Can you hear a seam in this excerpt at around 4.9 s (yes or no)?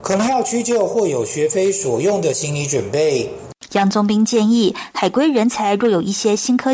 no